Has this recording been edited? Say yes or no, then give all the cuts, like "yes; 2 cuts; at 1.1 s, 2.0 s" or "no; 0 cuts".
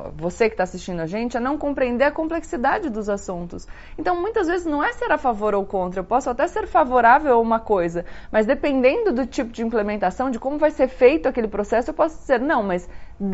no; 0 cuts